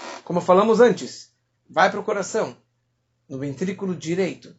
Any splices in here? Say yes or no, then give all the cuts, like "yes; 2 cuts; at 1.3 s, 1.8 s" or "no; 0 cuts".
yes; 1 cut; at 1.6 s